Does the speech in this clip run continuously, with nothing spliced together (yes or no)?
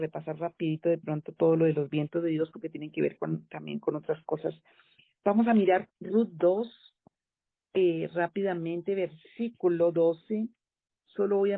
yes